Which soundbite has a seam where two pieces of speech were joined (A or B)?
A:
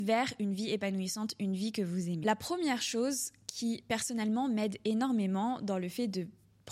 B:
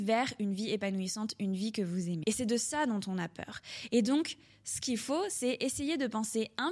B